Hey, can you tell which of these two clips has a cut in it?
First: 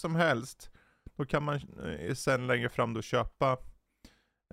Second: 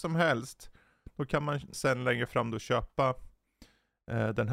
second; 1 cut; at 1.7 s

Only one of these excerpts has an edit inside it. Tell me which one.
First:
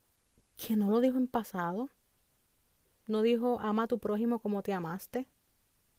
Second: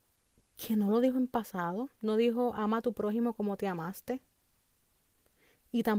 second; 1 cut; at 1.9 s

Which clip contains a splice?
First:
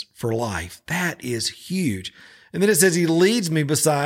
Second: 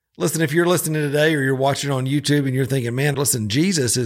second; 1 cut; at 3.1 s

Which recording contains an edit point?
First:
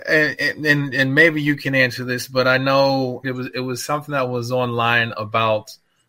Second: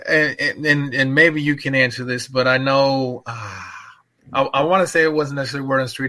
first; 1 cut; at 3.2 s

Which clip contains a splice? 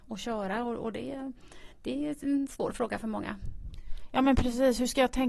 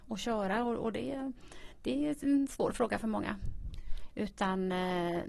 second; 1 cut; at 4.1 s

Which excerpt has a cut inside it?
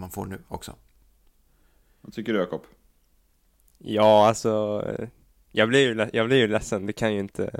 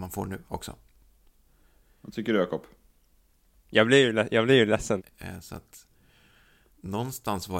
second; 2 cuts; at 3.5 s, 5.0 s

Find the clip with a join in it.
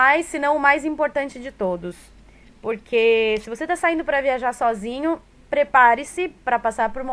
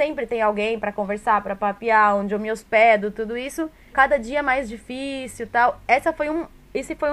second; 1 cut; at 3.9 s

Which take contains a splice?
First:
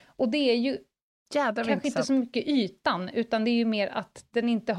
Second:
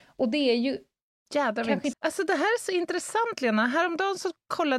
second; 1 cut; at 1.9 s

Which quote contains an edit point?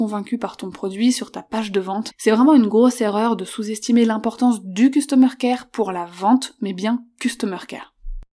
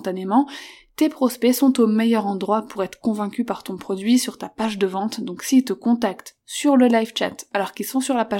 first; 2 cuts; at 2.1 s, 6.6 s

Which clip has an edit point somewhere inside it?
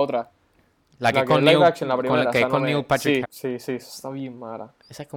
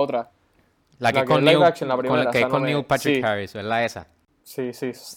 first; 1 cut; at 3.2 s

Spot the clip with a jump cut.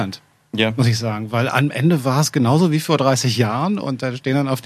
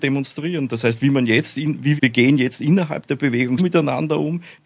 second; 2 cuts; at 2.0 s, 3.6 s

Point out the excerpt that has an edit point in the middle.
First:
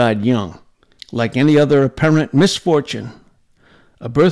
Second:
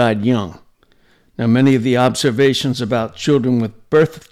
first; 1 cut; at 1.0 s

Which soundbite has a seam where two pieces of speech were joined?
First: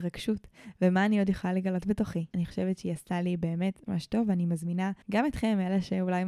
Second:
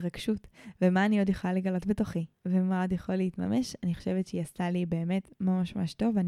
first; 3 cuts; at 2.3 s, 3.9 s, 5.0 s

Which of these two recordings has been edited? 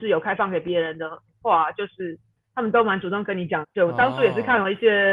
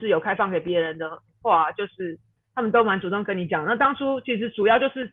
first; 1 cut; at 3.6 s

